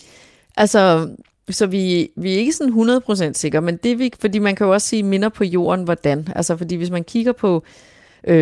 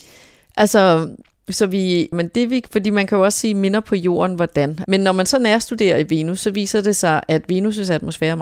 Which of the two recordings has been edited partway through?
second; 2 cuts; at 2.1 s, 4.8 s

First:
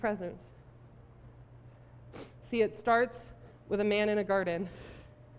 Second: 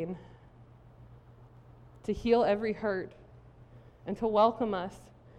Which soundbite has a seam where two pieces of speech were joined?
first; 1 cut; at 2.4 s

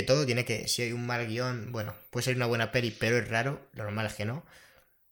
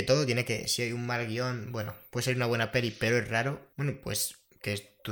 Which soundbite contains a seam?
second; 1 cut; at 3.7 s

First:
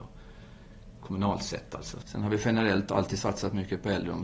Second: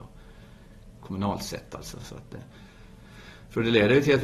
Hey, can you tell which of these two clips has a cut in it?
first; 1 cut; at 2.0 s

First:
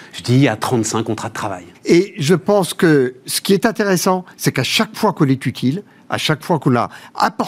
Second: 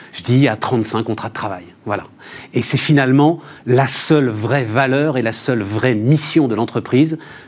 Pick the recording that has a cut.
first; 1 cut; at 1.7 s

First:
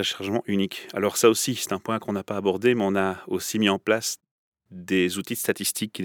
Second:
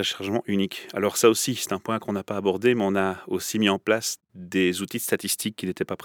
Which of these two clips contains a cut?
second; 1 cut; at 4.2 s

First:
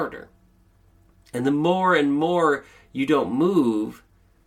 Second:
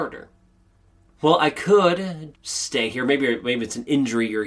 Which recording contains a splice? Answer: second; 2 cuts; at 1.1 s, 2.3 s

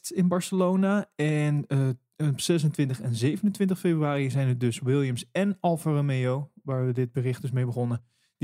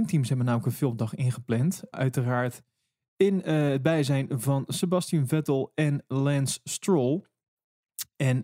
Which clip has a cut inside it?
second; 1 cut; at 1.9 s

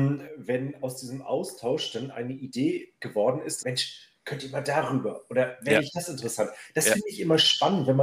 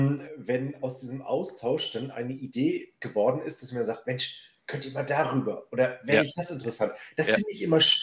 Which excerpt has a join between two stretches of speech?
first; 1 cut; at 3.6 s

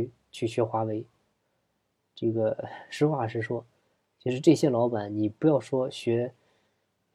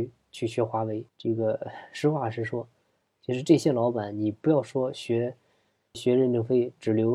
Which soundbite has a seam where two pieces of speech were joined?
second; 2 cuts; at 1.1 s, 5.9 s

